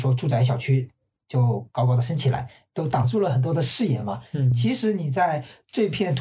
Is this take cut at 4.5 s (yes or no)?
no